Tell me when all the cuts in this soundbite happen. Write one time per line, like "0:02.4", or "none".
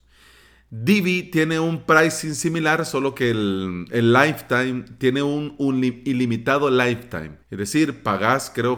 0:07.4